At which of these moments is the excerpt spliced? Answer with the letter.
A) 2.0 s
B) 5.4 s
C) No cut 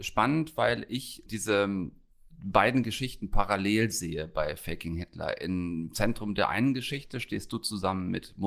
C